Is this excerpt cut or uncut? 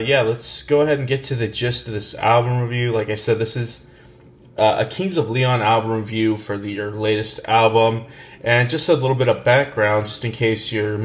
uncut